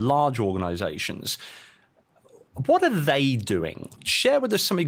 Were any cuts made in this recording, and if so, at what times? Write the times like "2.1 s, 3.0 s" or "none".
4.0 s